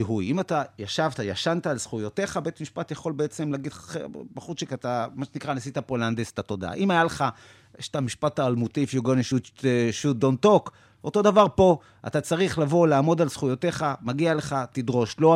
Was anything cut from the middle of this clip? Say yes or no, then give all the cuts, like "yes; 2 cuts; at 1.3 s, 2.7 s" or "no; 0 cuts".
no; 0 cuts